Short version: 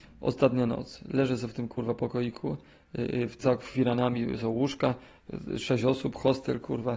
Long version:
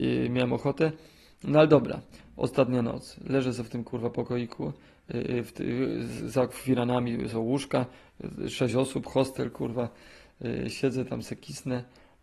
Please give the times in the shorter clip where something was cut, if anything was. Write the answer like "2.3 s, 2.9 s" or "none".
3.4 s